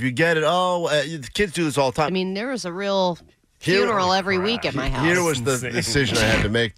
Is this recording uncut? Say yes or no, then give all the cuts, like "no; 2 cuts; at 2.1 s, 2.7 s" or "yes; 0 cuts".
no; 1 cut; at 2.1 s